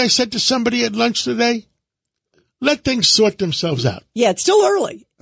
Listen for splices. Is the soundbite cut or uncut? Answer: uncut